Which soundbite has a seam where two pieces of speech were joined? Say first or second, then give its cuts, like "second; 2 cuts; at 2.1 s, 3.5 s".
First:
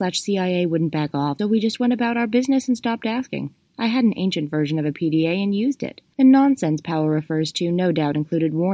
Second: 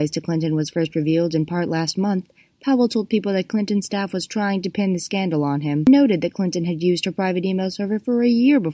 first; 1 cut; at 1.4 s